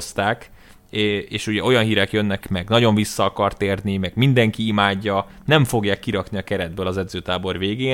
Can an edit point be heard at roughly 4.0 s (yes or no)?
no